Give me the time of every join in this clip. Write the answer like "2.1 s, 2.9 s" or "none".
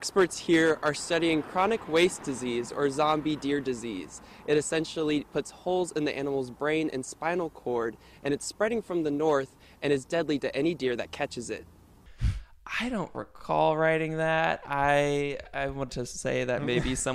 15.9 s

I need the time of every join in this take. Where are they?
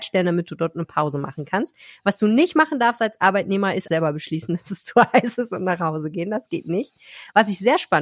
3.9 s

